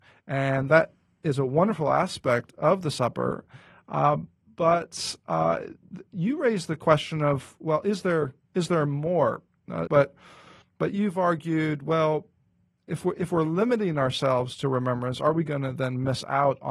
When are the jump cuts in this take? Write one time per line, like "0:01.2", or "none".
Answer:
0:09.9